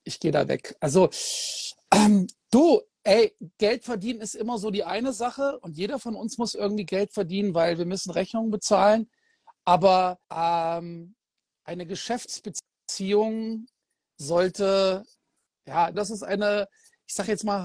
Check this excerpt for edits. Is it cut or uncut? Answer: cut